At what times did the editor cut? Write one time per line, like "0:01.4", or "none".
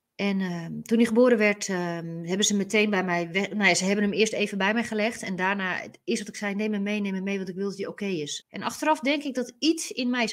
0:08.4